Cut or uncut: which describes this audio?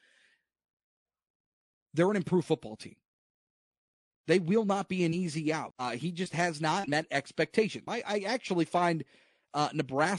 cut